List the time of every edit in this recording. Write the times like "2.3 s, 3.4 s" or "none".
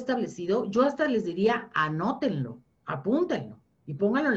none